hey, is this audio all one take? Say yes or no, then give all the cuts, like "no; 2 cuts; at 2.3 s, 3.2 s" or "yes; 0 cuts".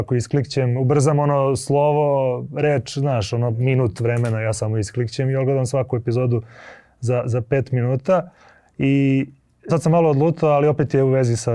no; 1 cut; at 9.7 s